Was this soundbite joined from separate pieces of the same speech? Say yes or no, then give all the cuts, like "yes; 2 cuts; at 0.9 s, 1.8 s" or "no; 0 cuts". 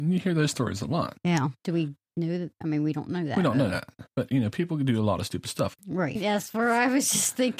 yes; 3 cuts; at 1.6 s, 4.1 s, 6.2 s